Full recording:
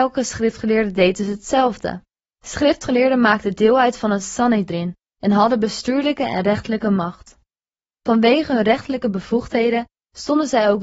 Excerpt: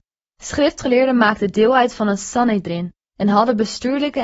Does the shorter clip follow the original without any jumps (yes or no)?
yes